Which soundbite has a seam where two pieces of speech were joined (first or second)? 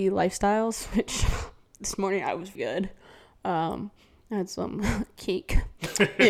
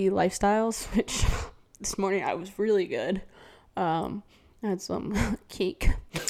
first